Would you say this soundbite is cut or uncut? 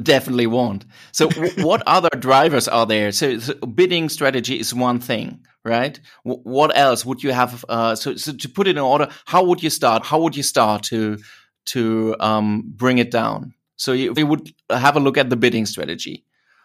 cut